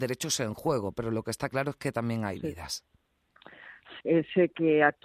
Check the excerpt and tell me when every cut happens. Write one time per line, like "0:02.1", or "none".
0:04.0